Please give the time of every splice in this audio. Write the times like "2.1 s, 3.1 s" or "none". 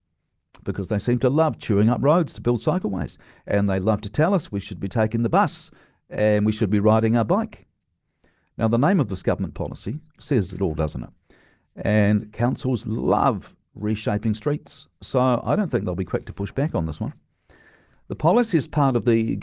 10.1 s

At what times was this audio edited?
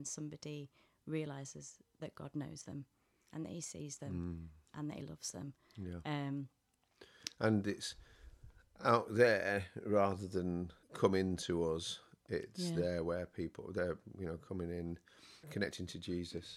10.8 s, 15.4 s

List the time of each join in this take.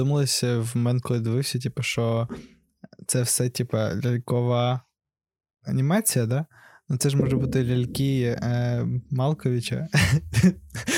none

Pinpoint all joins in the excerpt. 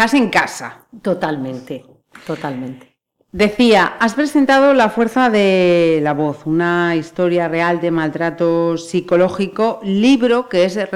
none

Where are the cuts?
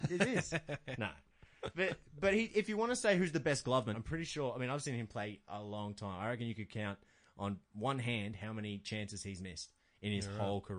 3.9 s

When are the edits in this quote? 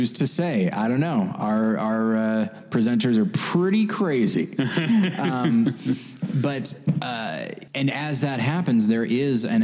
7.7 s

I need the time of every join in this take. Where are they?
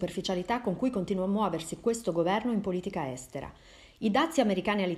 none

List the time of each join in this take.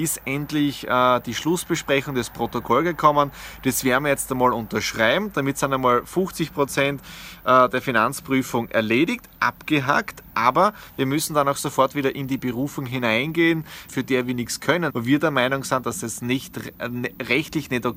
13.9 s, 14.9 s

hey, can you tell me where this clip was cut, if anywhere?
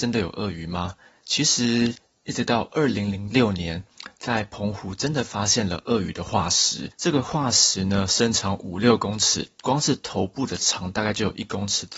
none

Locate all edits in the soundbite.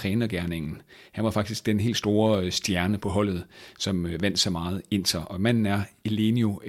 3.0 s

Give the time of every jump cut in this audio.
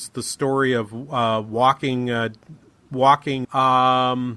3.4 s

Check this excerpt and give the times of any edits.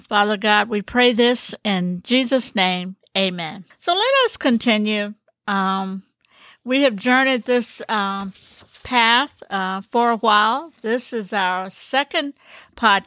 none

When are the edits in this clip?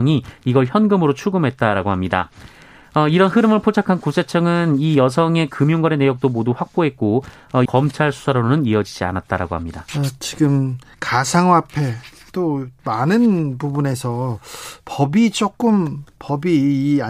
7.7 s, 9.9 s

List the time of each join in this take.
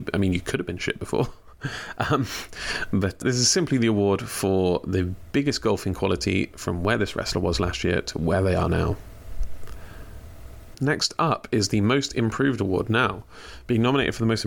3.2 s, 10.7 s

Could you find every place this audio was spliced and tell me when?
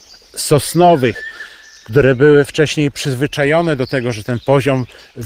none

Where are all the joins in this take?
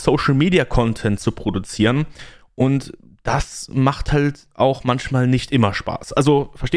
none

